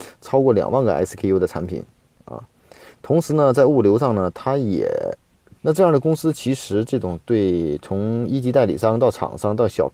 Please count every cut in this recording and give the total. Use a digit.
1